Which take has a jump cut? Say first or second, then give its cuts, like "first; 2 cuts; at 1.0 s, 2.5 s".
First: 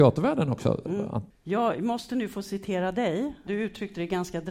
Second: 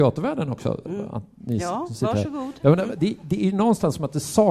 first; 2 cuts; at 1.3 s, 3.5 s